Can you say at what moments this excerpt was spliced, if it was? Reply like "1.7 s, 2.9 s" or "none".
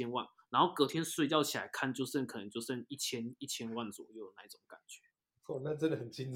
none